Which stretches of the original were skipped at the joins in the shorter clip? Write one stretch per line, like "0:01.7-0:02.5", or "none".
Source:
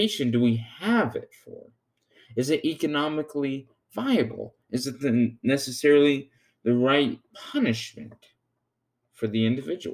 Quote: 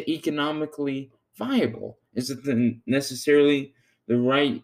none